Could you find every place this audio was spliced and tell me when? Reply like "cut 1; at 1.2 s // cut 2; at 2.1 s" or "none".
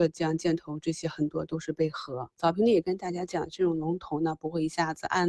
cut 1; at 2.4 s